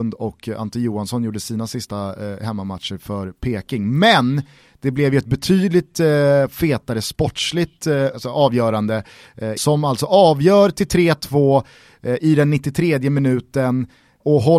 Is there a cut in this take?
yes; 2 cuts; at 8.1 s, 9.6 s

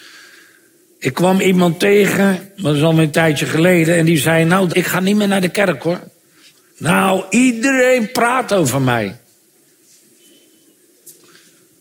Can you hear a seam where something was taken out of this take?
yes; 2 cuts; at 4.7 s, 6.7 s

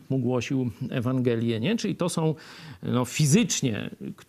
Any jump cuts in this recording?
no; 0 cuts

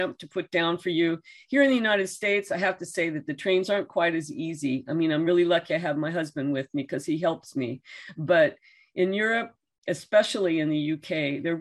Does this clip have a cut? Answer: no; 0 cuts

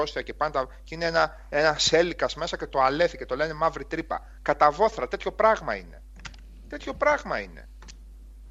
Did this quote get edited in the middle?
no; 0 cuts

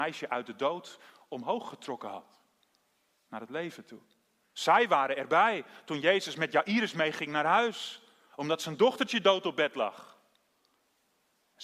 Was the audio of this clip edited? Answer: yes; 1 cut; at 4.4 s

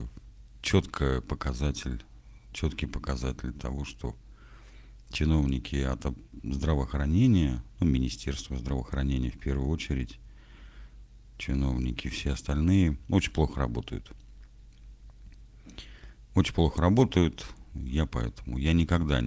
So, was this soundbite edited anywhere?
no; 0 cuts

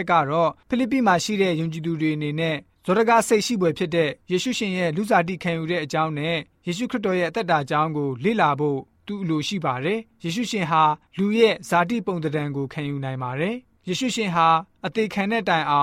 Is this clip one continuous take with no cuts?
yes; 0 cuts

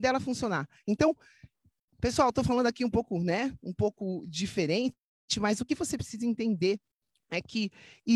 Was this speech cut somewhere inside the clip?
no; 0 cuts

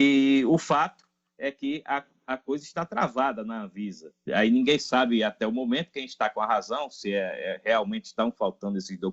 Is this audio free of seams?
no; 1 cut; at 4.3 s

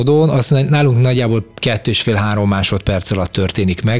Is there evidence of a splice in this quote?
no; 0 cuts

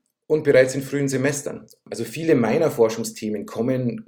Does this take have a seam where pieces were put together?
no; 0 cuts

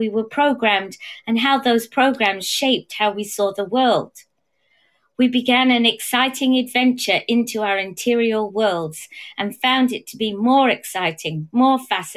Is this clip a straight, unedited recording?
yes; 0 cuts

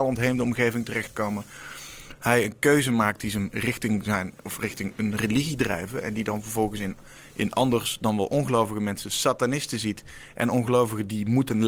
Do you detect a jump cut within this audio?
yes; 1 cut; at 2.2 s

